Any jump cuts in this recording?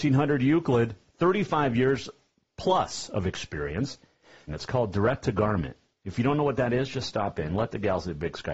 yes; 1 cut; at 4.5 s

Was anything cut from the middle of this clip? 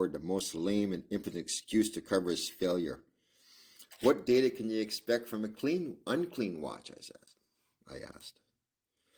no; 0 cuts

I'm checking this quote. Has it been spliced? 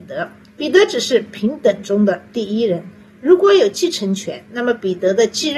no; 0 cuts

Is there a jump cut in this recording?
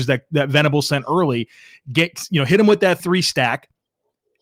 yes; 1 cut; at 3.0 s

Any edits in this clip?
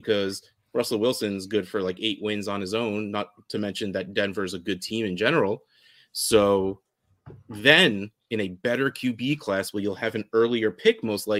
no; 0 cuts

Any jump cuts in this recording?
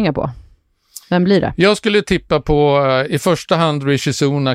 no; 0 cuts

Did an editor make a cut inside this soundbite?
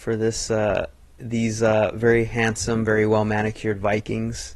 no; 0 cuts

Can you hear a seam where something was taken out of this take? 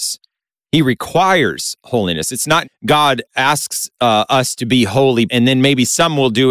yes; 2 cuts; at 2.6 s, 5.3 s

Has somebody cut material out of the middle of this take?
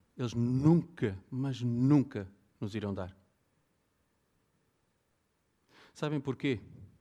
no; 0 cuts

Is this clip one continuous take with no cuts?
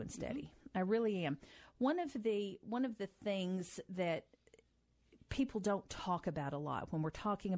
yes; 0 cuts

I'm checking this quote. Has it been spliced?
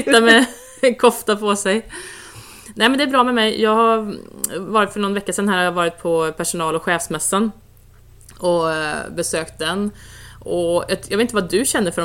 no; 0 cuts

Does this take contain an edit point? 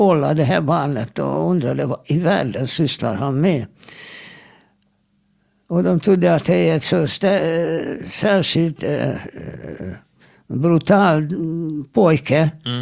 no; 0 cuts

